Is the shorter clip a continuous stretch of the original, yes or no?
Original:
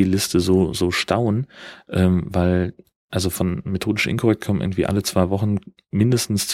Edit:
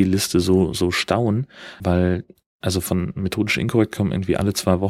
no